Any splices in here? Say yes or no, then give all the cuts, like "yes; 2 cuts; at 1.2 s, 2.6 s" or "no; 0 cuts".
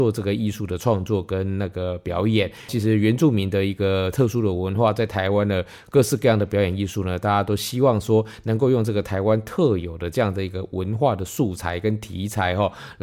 yes; 1 cut; at 2.7 s